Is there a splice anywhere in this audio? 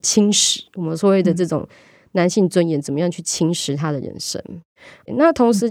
no; 0 cuts

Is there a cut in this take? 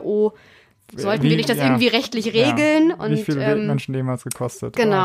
no; 0 cuts

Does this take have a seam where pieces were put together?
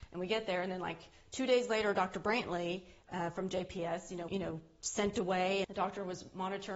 yes; 2 cuts; at 4.3 s, 5.6 s

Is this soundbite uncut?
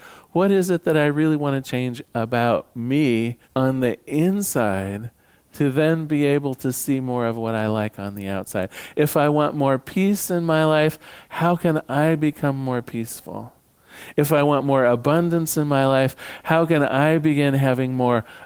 no; 1 cut; at 3.4 s

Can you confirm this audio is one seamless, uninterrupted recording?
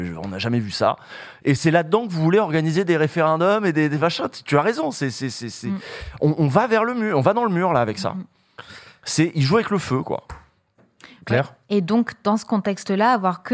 yes; 0 cuts

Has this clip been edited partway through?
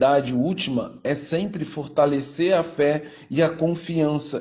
no; 0 cuts

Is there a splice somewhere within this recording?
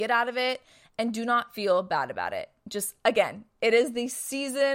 no; 0 cuts

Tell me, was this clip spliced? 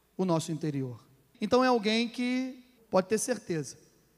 yes; 2 cuts; at 1.3 s, 2.8 s

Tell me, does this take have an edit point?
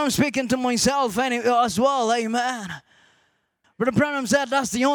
yes; 1 cut; at 3.6 s

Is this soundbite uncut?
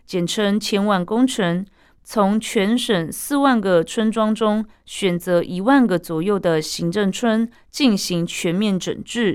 no; 1 cut; at 2.0 s

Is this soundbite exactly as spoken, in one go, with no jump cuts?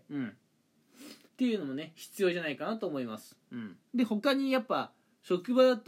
no; 2 cuts; at 1.3 s, 3.9 s

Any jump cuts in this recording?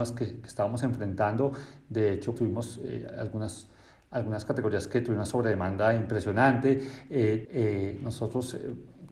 yes; 2 cuts; at 2.4 s, 7.4 s

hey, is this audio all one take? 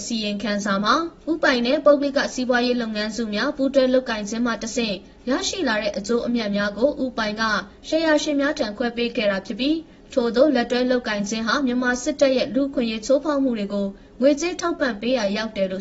yes; 0 cuts

